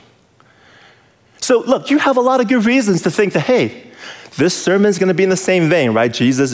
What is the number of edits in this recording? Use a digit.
0